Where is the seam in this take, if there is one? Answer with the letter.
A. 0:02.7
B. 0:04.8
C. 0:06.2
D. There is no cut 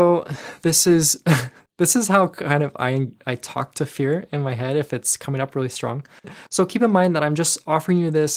C